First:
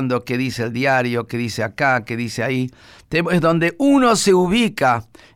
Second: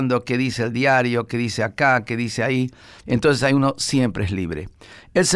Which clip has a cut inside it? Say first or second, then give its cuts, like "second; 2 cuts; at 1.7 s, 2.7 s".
second; 1 cut; at 3.0 s